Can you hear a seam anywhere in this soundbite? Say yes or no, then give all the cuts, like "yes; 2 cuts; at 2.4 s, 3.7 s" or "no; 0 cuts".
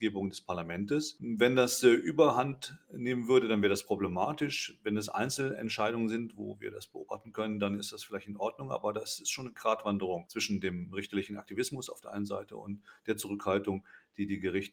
no; 0 cuts